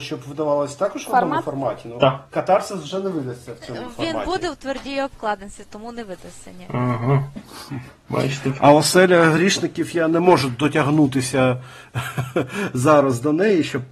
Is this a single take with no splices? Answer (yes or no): yes